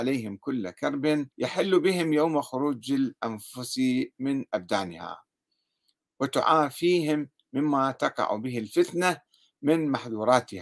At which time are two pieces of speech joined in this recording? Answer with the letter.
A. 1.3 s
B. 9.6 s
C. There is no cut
A